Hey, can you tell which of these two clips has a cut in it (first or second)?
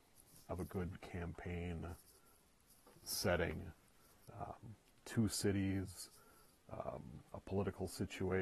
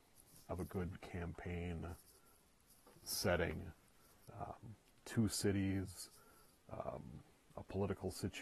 first